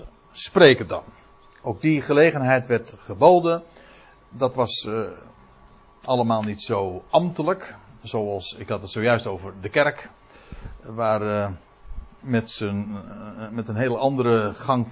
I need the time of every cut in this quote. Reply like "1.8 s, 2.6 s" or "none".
none